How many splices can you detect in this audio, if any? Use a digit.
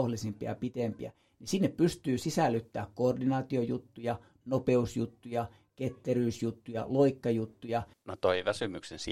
1